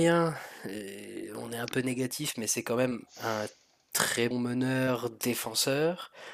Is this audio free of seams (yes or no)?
no